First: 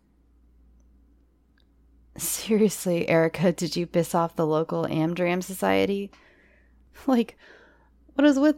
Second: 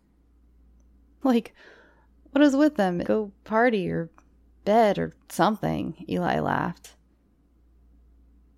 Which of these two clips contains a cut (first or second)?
second